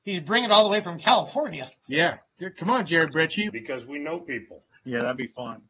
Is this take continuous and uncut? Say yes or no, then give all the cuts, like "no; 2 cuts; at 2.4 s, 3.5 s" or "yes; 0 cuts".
no; 2 cuts; at 3.5 s, 4.7 s